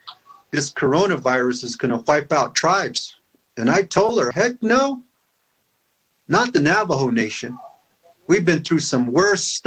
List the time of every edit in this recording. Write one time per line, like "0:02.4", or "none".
0:04.3